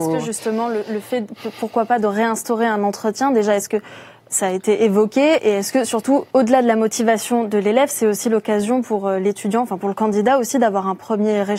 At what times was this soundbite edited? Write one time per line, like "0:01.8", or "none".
0:06.3